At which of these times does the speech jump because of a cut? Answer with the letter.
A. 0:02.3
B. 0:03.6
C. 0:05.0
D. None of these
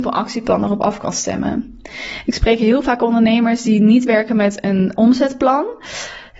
C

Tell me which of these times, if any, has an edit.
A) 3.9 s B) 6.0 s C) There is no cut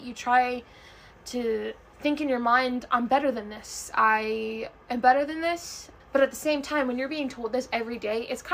B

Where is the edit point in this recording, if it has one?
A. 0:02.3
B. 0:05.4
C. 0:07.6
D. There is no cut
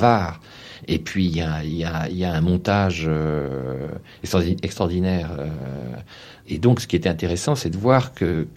D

